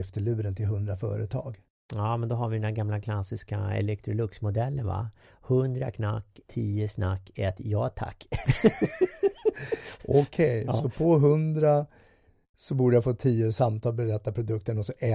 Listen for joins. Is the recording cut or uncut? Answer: cut